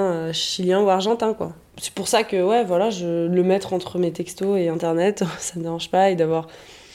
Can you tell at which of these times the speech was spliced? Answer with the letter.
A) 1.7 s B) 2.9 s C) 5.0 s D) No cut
A